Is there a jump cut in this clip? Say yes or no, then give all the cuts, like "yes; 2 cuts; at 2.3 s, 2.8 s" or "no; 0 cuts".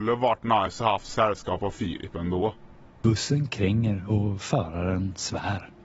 yes; 1 cut; at 2.9 s